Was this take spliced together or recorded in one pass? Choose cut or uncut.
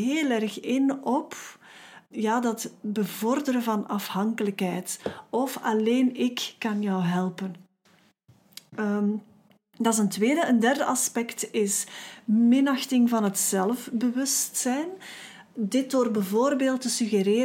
cut